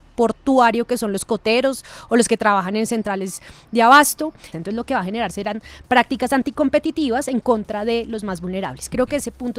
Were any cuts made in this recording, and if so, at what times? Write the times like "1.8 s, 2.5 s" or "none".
4.5 s